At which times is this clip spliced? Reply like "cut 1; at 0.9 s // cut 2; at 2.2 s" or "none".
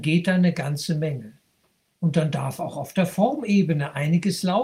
none